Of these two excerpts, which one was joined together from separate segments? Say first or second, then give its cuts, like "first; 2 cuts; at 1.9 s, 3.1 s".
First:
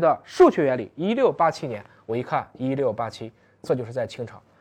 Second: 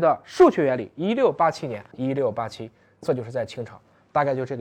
second; 1 cut; at 1.9 s